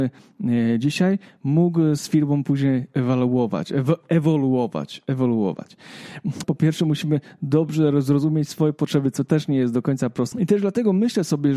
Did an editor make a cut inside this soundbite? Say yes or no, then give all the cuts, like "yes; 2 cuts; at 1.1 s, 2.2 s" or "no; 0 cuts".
yes; 2 cuts; at 6.4 s, 10.3 s